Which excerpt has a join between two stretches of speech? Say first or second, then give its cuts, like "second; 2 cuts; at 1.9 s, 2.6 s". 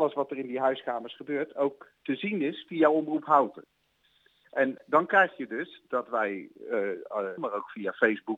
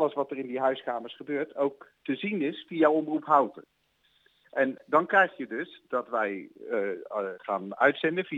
first; 1 cut; at 7.4 s